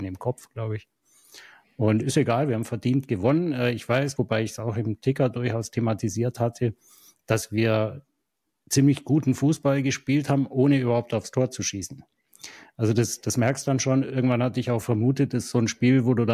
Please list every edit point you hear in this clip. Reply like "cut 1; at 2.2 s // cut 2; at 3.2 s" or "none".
cut 1; at 4.2 s